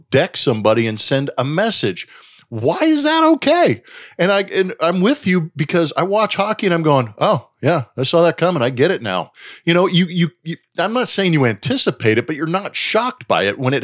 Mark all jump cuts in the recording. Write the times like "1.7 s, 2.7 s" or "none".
none